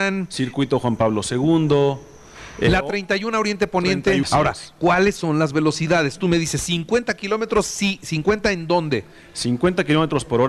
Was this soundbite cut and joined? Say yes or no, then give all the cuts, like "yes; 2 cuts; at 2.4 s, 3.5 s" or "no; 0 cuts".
yes; 1 cut; at 4.2 s